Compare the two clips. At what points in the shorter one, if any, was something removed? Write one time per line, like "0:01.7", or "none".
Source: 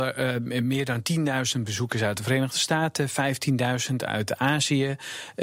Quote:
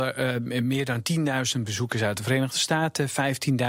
none